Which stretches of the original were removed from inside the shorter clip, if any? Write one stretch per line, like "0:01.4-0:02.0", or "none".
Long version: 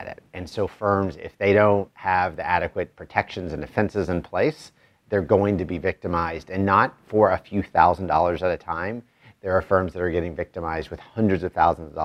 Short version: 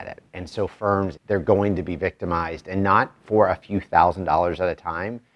0:01.2-0:05.0